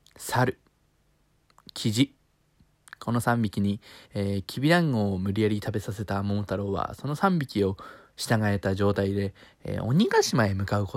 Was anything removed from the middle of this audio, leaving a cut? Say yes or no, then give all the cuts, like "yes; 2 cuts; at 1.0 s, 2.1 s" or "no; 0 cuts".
no; 0 cuts